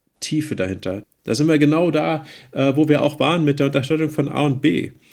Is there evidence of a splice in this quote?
yes; 1 cut; at 1.0 s

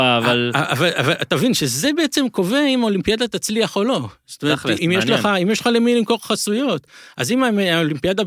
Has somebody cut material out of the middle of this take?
yes; 1 cut; at 4.8 s

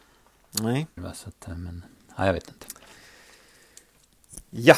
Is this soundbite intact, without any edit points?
no; 1 cut; at 1.0 s

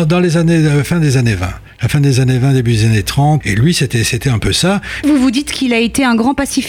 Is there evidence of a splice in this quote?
yes; 2 cuts; at 3.4 s, 5.0 s

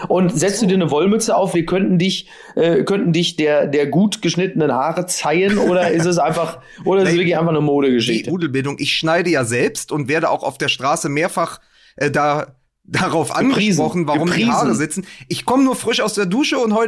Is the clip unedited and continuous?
no; 2 cuts; at 1.5 s, 8.3 s

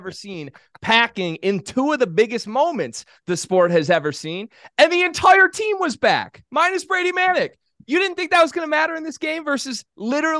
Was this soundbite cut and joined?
no; 0 cuts

